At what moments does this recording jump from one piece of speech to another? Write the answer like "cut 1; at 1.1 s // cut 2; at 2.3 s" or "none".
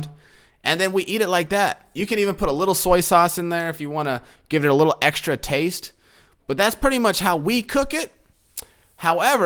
none